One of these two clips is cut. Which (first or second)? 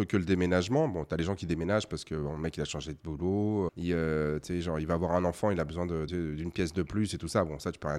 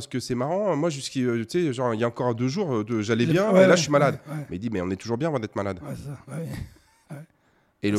first